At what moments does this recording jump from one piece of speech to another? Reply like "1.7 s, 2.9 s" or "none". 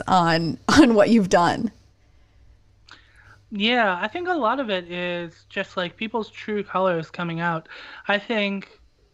none